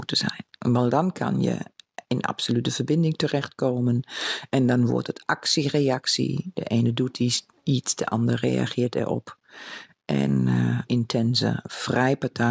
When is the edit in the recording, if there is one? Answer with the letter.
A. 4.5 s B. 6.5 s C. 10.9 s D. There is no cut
C